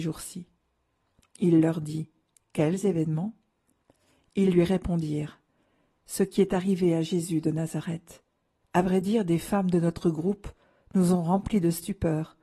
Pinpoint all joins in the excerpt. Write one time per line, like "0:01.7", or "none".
0:08.6